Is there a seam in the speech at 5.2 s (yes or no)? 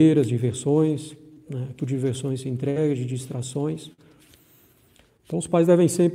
no